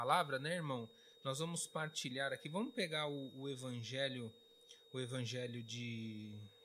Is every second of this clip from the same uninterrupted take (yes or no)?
yes